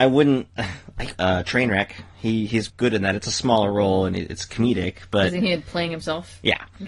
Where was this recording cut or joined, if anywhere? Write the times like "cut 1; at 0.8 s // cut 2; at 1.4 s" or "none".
cut 1; at 1.1 s // cut 2; at 2.7 s

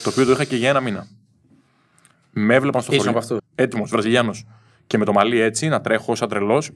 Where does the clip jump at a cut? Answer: cut 1; at 3.4 s

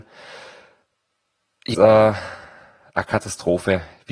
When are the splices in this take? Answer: cut 1; at 1.7 s

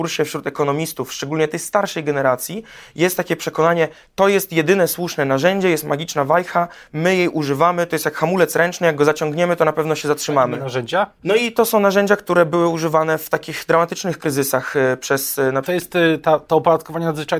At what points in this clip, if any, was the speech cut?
cut 1; at 11.2 s // cut 2; at 15.6 s

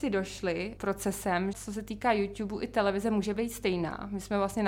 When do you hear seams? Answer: cut 1; at 1.5 s

